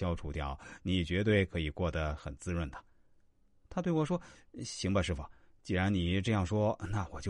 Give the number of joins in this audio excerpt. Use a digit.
0